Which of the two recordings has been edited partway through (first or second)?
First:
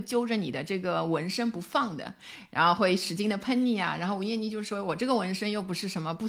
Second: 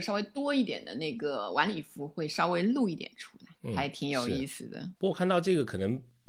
second